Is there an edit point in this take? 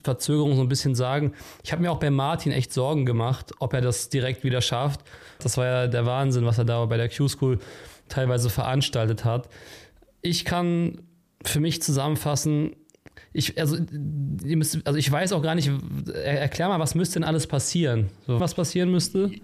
yes; 2 cuts; at 5.4 s, 18.4 s

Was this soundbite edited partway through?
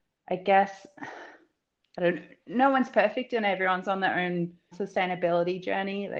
yes; 2 cuts; at 1.8 s, 4.7 s

